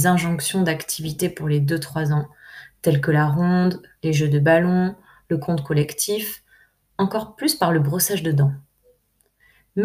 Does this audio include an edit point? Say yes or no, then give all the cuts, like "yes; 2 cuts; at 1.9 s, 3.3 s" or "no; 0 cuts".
no; 0 cuts